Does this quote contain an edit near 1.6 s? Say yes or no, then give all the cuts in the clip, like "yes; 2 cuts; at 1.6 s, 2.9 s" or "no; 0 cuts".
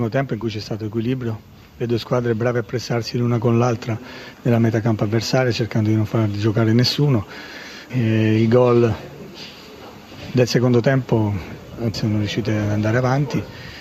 no; 2 cuts; at 7.9 s, 11.9 s